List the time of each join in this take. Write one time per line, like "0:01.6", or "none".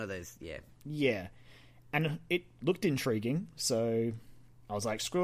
none

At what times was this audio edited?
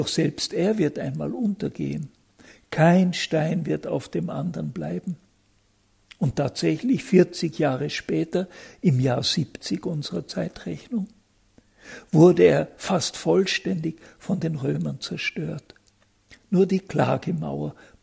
none

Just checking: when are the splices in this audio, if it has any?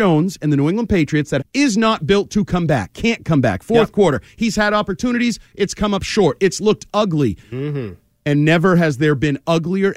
0:01.4
0:07.4

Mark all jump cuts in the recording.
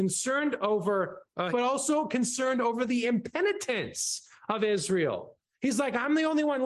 0:01.5

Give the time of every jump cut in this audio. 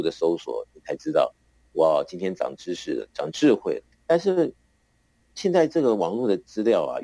0:03.9

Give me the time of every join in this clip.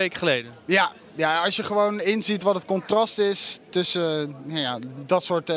none

